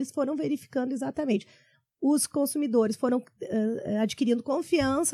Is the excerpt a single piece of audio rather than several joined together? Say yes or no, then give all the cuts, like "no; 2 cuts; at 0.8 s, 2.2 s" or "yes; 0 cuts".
yes; 0 cuts